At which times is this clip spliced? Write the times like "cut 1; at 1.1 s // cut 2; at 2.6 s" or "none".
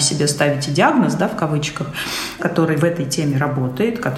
cut 1; at 2.4 s